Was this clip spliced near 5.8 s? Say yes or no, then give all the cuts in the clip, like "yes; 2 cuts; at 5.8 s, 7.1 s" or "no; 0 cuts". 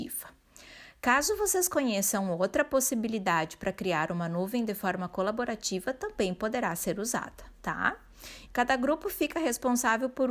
no; 1 cut; at 8.5 s